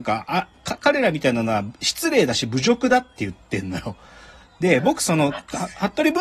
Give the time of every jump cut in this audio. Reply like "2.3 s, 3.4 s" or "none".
none